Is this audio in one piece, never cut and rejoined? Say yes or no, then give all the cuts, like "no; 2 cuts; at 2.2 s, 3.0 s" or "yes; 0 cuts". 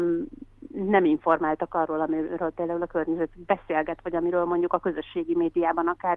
yes; 0 cuts